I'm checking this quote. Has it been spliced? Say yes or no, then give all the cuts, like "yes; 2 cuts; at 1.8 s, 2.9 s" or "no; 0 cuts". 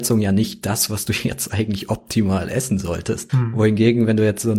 yes; 1 cut; at 3.3 s